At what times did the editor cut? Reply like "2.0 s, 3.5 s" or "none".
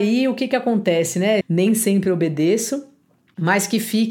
1.4 s